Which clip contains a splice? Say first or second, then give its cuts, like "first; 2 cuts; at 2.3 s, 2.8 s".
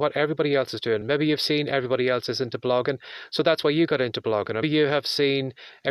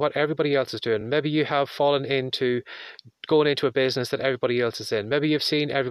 first; 2 cuts; at 1.0 s, 4.6 s